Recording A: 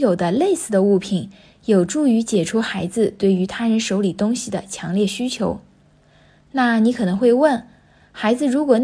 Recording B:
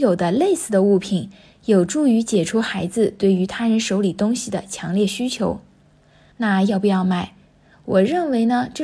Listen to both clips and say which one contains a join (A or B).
B